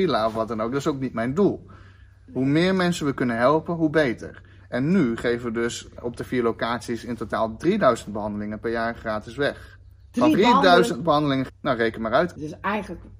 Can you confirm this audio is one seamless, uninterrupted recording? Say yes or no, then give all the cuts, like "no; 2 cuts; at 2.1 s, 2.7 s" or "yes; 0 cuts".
no; 3 cuts; at 6.0 s, 10.3 s, 11.5 s